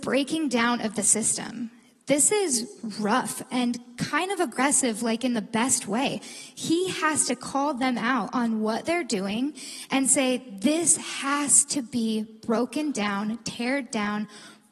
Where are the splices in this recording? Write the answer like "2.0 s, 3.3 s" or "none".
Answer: none